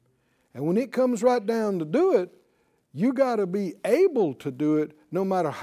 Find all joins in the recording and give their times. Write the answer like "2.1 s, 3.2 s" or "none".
none